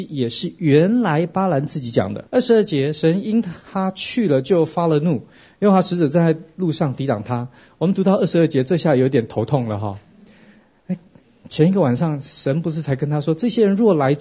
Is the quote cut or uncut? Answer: cut